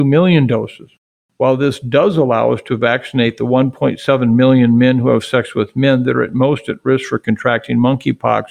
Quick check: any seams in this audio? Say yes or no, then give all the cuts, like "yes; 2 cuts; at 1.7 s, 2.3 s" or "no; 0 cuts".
no; 0 cuts